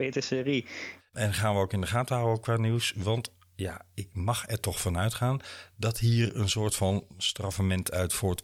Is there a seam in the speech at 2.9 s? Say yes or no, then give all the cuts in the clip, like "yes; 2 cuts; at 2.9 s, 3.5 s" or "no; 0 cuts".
no; 1 cut; at 1.0 s